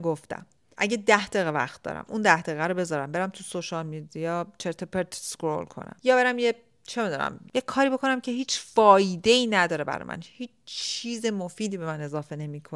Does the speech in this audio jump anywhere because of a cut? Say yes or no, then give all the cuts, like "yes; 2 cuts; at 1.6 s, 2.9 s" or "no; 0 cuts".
no; 0 cuts